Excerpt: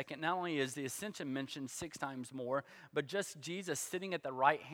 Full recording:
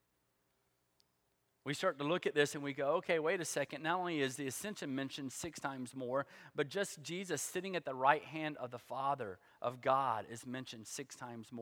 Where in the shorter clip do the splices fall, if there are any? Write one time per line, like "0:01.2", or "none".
none